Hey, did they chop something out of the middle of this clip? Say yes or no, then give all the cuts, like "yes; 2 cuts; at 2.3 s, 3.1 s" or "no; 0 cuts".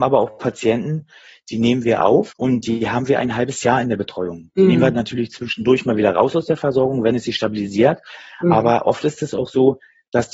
no; 0 cuts